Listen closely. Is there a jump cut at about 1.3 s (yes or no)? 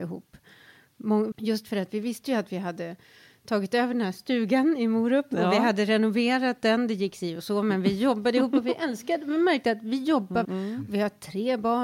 yes